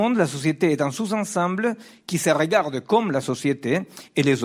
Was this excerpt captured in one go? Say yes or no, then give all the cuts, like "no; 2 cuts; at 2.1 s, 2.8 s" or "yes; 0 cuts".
yes; 0 cuts